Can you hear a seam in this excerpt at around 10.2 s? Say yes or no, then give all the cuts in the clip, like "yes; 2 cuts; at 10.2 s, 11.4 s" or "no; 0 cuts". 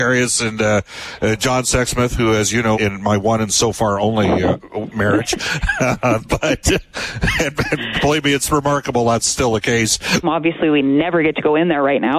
yes; 2 cuts; at 2.7 s, 10.2 s